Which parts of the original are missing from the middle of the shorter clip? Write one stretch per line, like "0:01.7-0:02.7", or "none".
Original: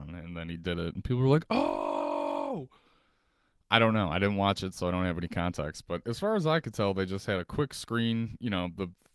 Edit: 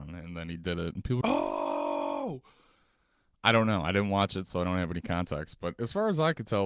0:01.2-0:01.5